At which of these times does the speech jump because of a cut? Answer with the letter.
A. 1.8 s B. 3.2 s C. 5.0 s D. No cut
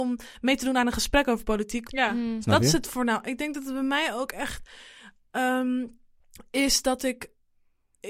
A